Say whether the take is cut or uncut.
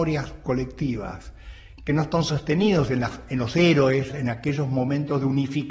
cut